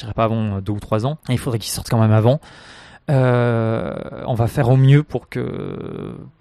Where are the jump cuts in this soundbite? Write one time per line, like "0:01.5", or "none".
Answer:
0:01.2